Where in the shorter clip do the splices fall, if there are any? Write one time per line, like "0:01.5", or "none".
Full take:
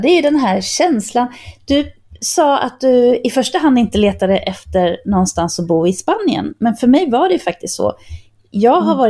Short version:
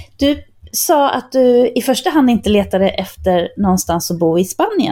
none